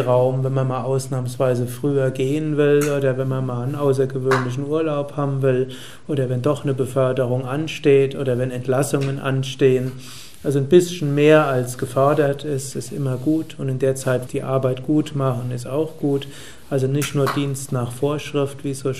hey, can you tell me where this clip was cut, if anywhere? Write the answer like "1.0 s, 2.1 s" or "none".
14.3 s